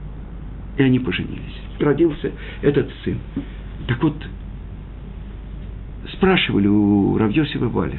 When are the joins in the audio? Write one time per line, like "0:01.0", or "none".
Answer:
0:01.8